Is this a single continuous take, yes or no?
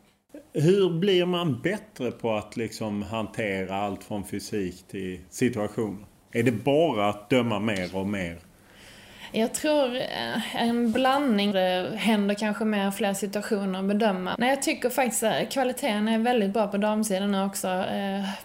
no